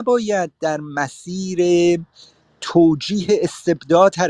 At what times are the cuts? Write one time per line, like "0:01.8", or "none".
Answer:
none